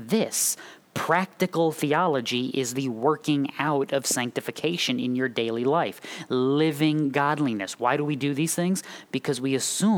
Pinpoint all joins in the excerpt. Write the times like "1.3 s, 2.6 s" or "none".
none